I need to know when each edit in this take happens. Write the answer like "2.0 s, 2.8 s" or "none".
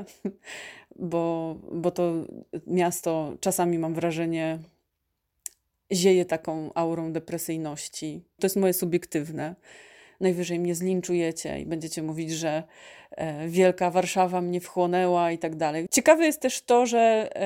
8.4 s, 15.9 s